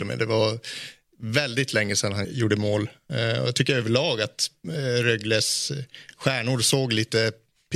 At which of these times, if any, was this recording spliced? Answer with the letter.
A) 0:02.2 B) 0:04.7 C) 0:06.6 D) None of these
A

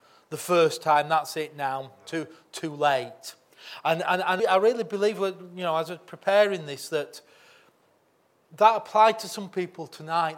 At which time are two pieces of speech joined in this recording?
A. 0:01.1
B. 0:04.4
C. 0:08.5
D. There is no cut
B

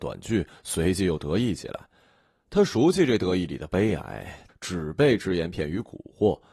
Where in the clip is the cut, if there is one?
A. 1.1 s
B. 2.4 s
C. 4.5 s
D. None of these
C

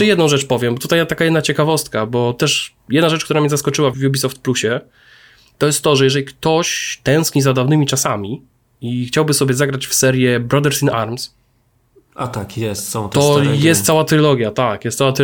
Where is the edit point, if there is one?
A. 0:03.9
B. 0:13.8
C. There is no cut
A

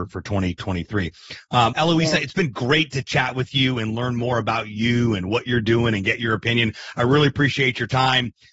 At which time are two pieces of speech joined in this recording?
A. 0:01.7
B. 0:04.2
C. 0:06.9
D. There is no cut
A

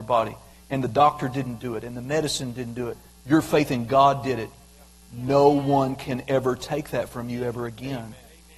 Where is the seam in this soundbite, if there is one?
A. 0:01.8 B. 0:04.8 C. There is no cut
C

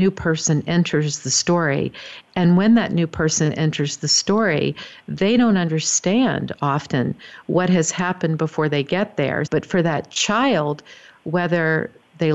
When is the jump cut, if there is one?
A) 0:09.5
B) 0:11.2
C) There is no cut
A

